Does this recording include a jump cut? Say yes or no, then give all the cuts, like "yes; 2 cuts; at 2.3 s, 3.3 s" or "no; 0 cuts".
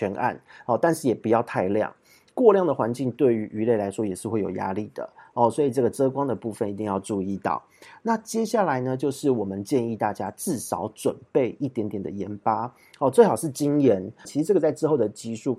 yes; 1 cut; at 14.2 s